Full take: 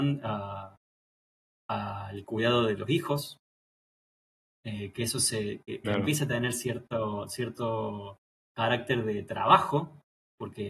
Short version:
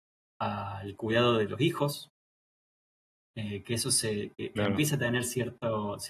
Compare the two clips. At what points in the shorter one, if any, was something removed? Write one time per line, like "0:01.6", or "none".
none